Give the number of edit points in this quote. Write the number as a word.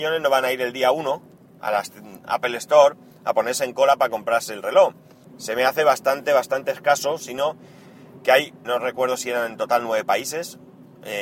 three